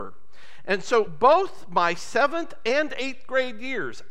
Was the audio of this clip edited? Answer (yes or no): no